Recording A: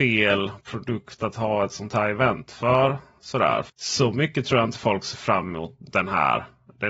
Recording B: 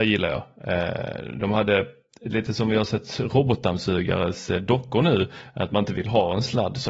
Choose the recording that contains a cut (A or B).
A